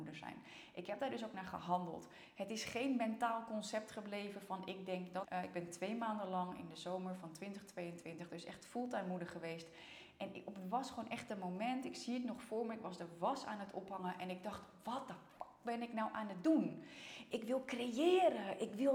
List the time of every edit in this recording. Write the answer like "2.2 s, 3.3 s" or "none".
5.2 s